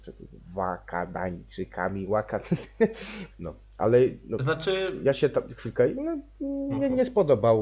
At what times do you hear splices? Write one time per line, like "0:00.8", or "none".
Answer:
0:03.3